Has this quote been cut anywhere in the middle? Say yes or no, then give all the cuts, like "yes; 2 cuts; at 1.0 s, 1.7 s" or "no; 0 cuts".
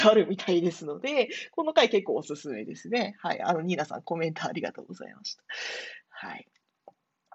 no; 0 cuts